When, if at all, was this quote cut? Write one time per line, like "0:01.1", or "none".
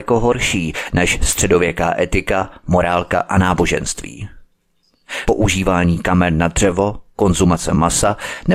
0:05.3